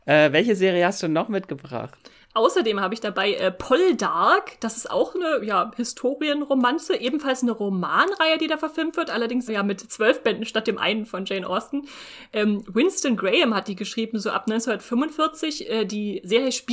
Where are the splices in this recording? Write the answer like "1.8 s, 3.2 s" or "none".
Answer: 9.5 s